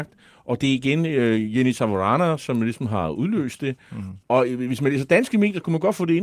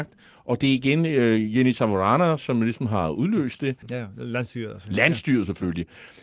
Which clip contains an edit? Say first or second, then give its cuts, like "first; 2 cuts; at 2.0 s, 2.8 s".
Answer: second; 1 cut; at 3.8 s